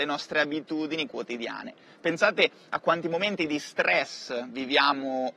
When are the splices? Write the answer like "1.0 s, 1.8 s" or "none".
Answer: 1.9 s

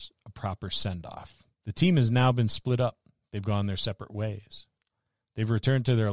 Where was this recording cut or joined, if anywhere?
1.5 s

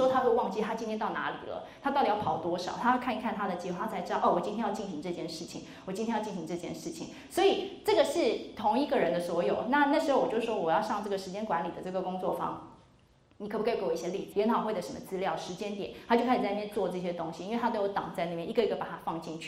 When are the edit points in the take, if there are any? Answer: 14.3 s

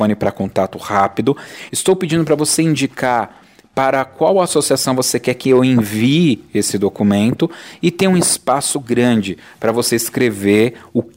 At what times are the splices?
1.7 s

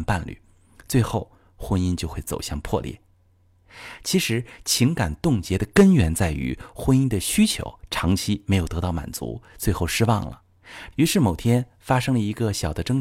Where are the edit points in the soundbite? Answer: 10.9 s

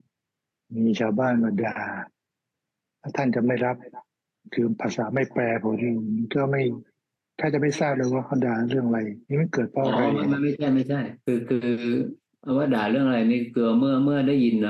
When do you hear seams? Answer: 9.2 s, 11.2 s

